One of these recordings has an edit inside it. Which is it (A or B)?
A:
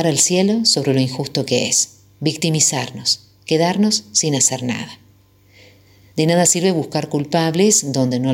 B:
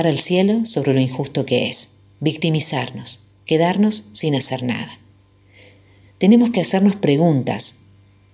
B